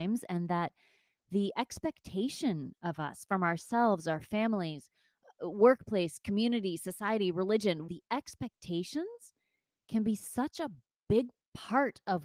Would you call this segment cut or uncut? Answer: cut